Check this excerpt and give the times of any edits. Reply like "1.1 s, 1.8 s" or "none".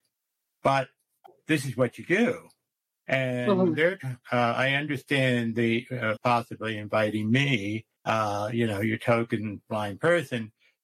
6.2 s, 8.0 s